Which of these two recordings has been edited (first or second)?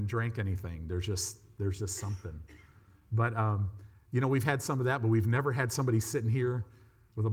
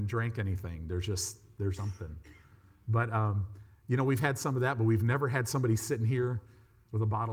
second